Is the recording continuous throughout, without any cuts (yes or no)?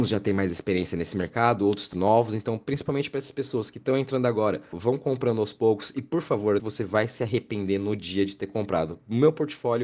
no